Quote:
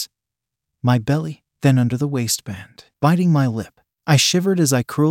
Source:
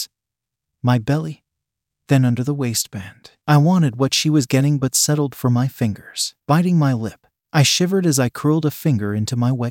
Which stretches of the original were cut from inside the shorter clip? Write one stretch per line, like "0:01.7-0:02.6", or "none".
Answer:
0:01.5-0:02.0
0:03.4-0:06.4